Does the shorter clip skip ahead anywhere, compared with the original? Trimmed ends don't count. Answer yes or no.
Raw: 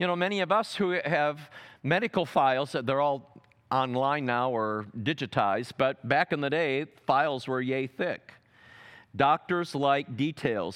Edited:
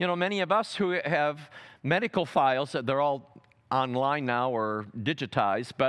no